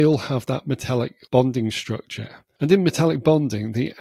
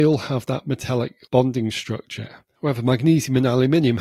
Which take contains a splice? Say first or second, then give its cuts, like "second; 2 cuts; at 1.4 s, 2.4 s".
second; 1 cut; at 2.5 s